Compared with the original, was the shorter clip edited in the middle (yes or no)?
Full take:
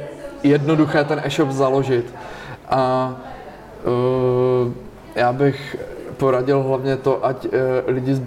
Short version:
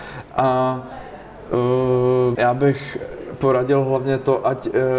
yes